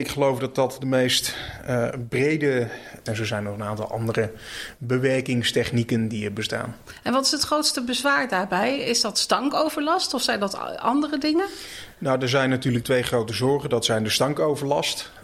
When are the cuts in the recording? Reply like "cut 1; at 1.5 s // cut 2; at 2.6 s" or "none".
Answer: cut 1; at 3.1 s